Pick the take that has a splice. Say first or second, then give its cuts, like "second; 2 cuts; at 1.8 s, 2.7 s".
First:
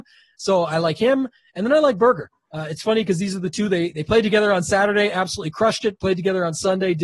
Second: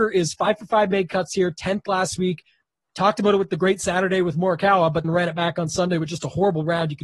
second; 1 cut; at 5.0 s